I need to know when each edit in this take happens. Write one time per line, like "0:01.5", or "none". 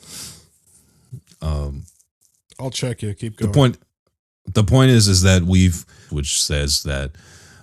0:06.1